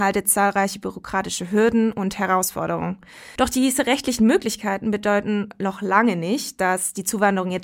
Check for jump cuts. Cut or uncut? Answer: cut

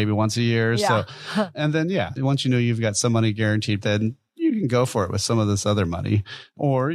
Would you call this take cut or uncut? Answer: cut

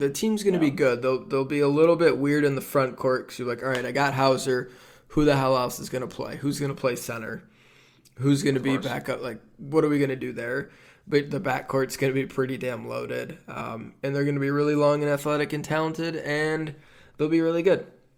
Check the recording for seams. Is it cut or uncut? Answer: uncut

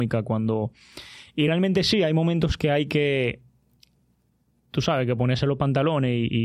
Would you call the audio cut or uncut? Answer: uncut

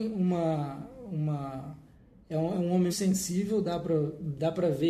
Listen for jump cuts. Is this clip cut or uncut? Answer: cut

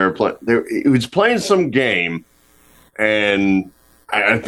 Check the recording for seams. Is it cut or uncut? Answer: uncut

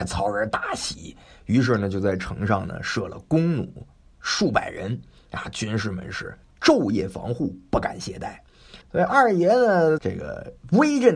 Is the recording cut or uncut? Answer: cut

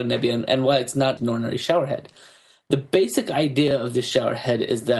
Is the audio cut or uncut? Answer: cut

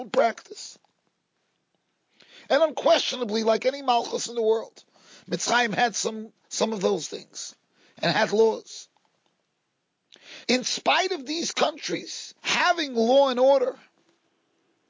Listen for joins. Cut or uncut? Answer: cut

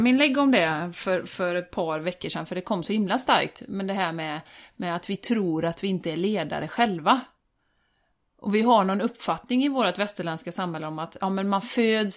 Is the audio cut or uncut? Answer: uncut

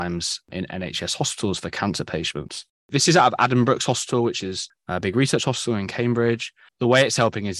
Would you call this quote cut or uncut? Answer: cut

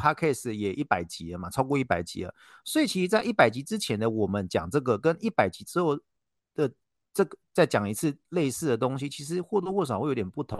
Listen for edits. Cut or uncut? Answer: uncut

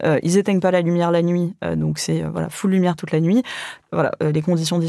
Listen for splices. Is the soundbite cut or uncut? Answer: cut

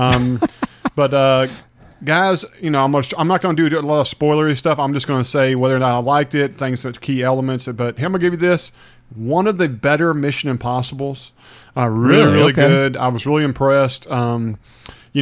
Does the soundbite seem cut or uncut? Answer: uncut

